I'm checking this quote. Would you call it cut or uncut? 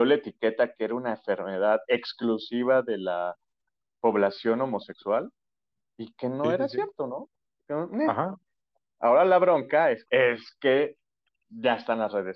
cut